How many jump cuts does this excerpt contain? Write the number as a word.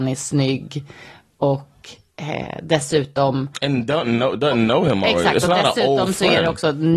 zero